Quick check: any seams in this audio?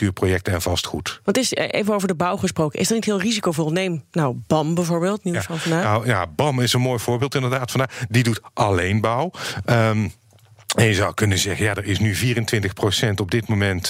no; 0 cuts

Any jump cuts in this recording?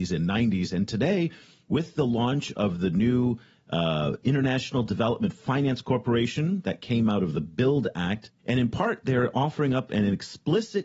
yes; 1 cut; at 8.4 s

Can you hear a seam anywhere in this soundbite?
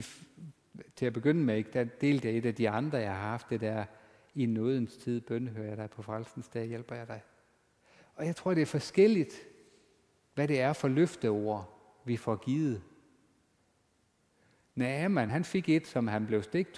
no; 0 cuts

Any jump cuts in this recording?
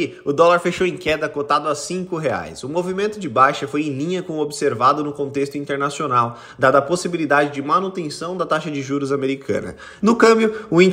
yes; 1 cut; at 10.0 s

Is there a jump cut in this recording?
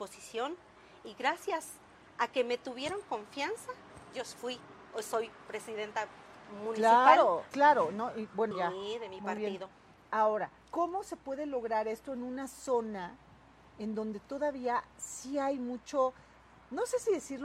yes; 3 cuts; at 7.5 s, 8.5 s, 10.6 s

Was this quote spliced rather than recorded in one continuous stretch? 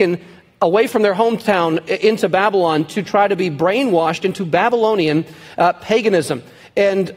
no; 0 cuts

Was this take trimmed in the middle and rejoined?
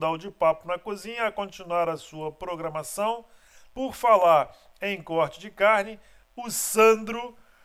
yes; 2 cuts; at 3.7 s, 6.2 s

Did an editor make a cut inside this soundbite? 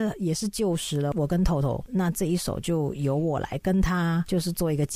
yes; 1 cut; at 1.9 s

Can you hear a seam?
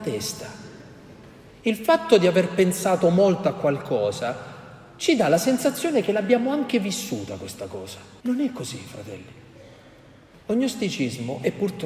yes; 2 cuts; at 8.2 s, 10.3 s

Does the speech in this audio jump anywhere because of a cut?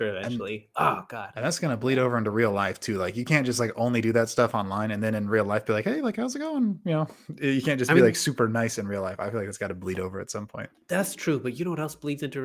no; 0 cuts

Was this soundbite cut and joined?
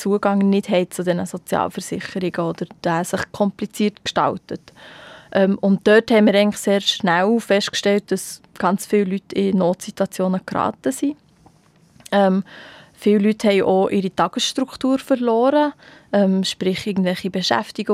no; 0 cuts

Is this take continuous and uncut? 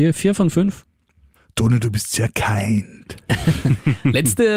yes; 0 cuts

